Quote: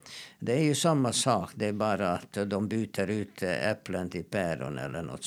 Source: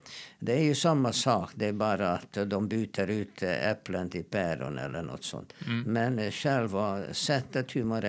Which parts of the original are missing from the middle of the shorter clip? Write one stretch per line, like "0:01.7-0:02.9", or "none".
none